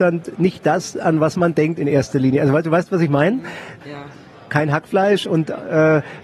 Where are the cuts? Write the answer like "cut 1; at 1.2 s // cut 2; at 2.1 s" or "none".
cut 1; at 3.8 s